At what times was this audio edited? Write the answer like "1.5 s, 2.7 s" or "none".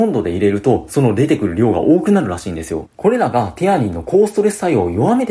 2.9 s

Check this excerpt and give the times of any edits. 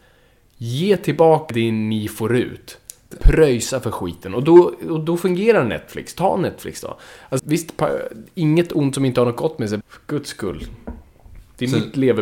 1.5 s, 7.4 s, 9.8 s

